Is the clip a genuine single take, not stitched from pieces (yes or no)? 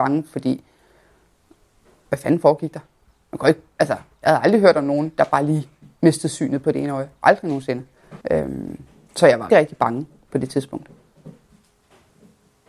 no